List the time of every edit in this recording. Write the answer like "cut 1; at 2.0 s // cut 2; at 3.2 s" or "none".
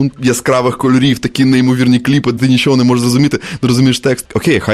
none